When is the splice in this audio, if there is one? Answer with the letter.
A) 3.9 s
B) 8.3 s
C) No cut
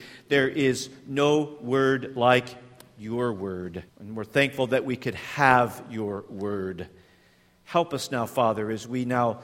A